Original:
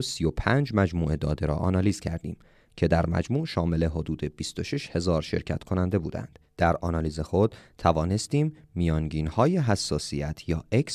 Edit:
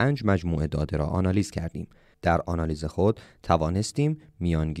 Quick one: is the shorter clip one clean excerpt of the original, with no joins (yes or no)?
no